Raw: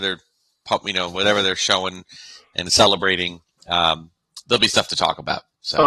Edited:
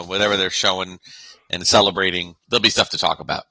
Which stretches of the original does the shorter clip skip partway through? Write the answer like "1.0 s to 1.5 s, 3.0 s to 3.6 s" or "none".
3.5 s to 4.4 s